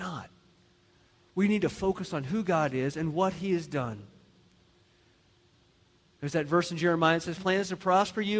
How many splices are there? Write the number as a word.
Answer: one